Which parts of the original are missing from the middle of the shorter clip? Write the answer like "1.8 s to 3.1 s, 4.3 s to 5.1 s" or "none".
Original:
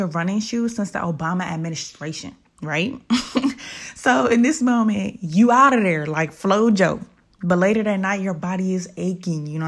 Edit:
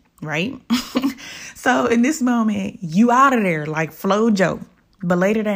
none